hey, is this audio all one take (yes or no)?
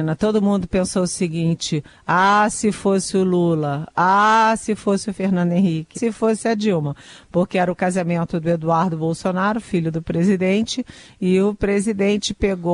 no